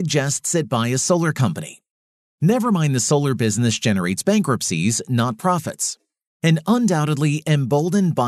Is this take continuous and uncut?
no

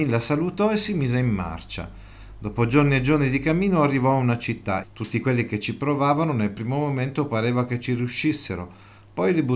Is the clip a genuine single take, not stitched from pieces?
no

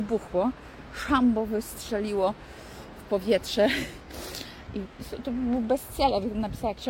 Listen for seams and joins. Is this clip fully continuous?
no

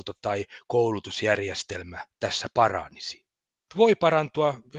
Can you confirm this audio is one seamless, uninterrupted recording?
no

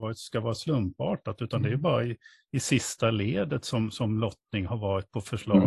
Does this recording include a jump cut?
no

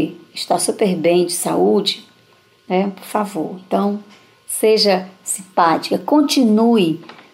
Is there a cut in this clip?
no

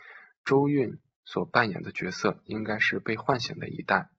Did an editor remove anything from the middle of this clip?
no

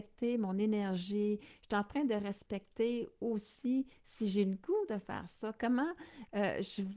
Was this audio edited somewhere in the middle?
no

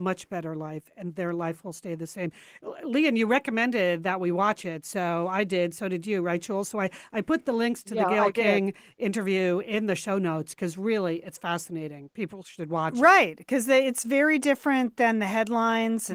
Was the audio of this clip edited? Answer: no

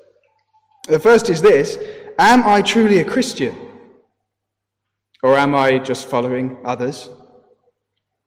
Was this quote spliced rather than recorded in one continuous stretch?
no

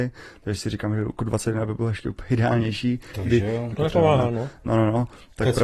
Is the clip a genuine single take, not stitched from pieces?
no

